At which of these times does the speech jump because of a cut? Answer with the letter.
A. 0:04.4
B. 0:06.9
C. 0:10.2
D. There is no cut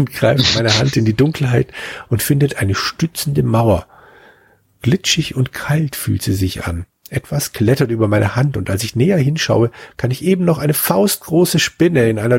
D